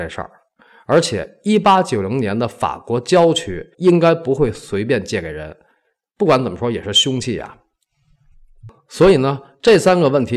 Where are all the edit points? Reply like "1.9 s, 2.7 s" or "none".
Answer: 3.7 s